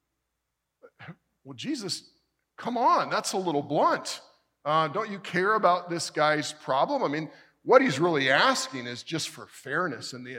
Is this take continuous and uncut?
yes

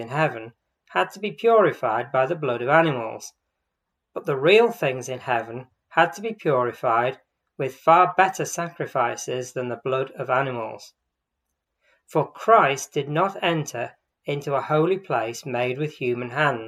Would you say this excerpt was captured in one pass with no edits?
yes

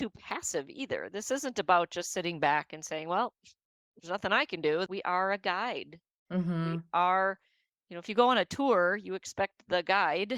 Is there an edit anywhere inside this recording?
yes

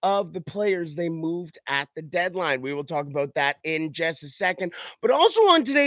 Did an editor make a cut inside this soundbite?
no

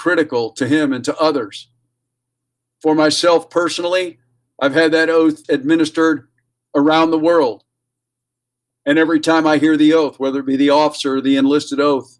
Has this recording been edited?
yes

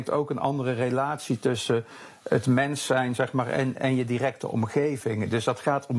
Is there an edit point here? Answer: no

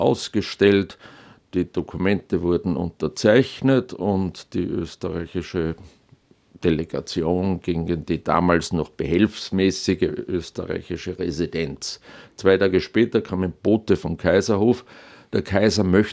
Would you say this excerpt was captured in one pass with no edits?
yes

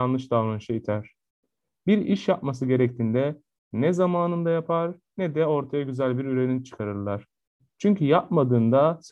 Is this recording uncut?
yes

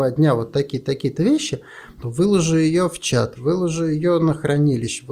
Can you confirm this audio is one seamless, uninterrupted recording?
no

